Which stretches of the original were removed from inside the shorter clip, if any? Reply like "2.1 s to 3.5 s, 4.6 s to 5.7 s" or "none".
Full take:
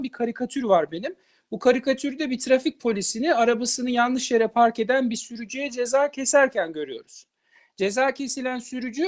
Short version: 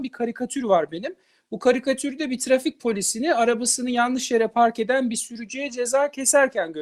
none